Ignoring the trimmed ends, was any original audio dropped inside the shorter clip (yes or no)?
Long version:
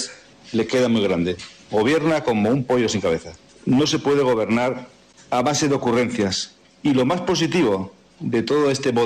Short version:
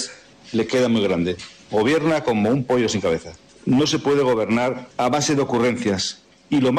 yes